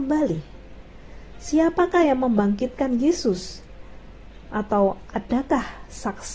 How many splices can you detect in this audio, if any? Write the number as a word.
zero